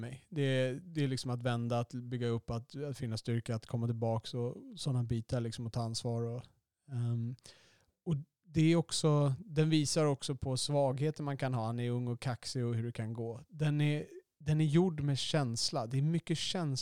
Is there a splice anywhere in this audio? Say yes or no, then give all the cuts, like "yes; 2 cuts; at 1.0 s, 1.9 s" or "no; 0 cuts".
no; 0 cuts